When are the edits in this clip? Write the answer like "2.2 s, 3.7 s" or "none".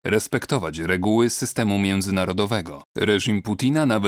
2.9 s